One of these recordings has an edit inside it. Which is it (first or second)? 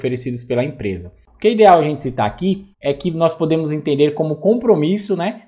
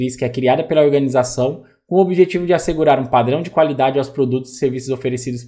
first